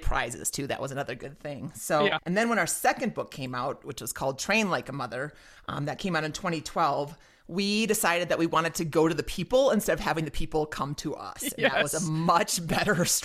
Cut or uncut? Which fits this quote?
cut